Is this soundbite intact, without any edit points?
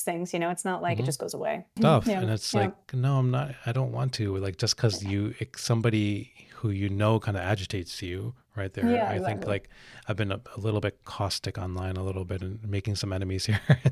no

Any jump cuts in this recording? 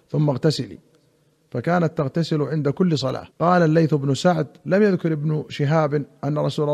yes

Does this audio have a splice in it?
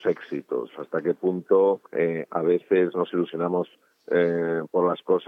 yes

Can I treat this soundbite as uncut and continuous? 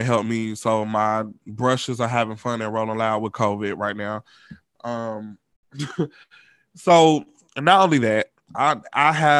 yes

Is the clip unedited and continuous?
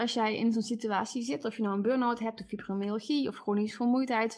yes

